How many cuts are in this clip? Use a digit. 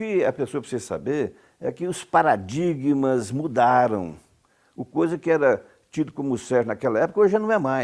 0